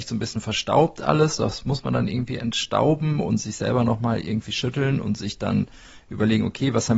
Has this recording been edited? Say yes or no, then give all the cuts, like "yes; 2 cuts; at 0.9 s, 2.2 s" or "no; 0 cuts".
no; 0 cuts